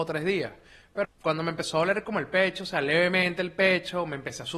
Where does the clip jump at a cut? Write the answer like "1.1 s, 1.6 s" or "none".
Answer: 1.0 s